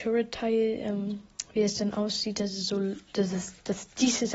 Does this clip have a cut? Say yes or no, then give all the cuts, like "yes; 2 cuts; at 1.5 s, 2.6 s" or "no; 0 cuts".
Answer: no; 0 cuts